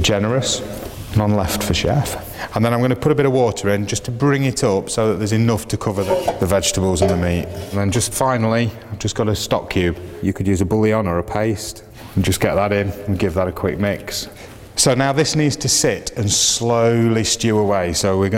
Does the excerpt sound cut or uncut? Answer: uncut